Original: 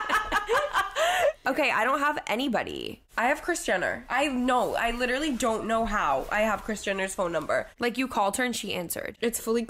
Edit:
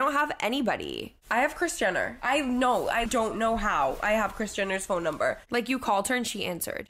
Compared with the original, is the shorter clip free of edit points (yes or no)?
no